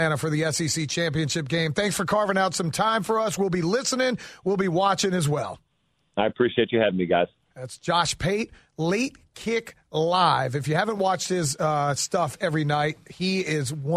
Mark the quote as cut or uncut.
uncut